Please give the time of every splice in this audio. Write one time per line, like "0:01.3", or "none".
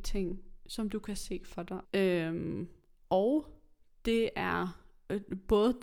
0:01.8